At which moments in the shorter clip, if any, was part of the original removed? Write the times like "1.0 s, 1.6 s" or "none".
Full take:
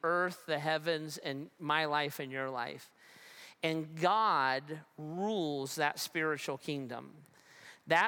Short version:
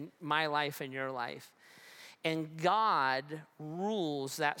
none